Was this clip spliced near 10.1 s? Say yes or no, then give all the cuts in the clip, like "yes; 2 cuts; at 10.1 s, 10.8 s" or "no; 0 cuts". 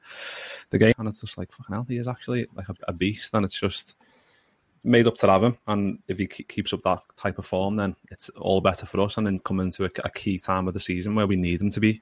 no; 1 cut; at 0.9 s